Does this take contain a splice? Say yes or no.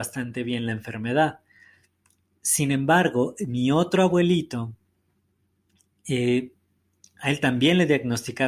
no